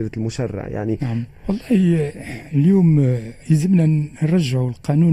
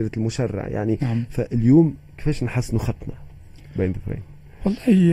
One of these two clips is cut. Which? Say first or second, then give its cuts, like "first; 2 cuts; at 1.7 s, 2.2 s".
first; 2 cuts; at 1.3 s, 3.4 s